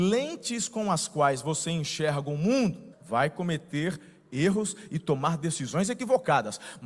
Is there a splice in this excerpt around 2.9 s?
yes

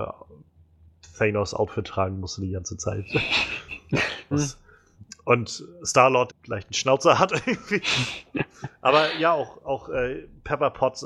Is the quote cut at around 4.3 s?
yes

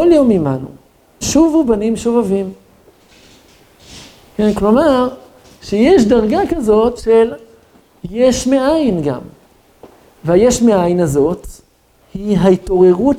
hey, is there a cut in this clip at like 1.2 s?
yes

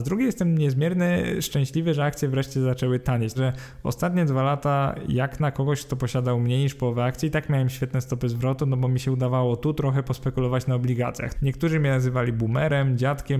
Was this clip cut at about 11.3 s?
yes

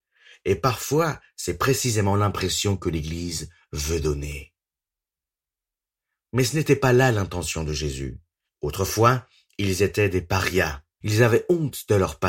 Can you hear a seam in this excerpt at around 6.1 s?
no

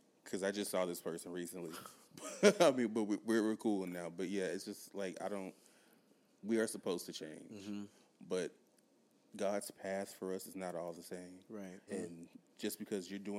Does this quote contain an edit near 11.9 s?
yes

